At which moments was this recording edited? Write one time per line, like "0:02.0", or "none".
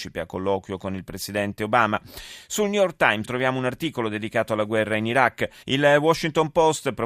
0:03.2
0:05.6